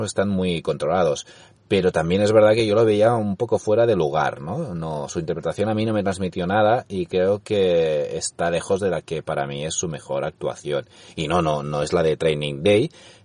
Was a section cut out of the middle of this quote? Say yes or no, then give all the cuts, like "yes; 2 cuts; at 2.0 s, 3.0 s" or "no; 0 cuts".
no; 0 cuts